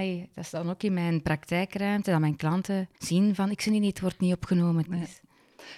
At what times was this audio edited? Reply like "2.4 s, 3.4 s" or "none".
2.9 s, 4.9 s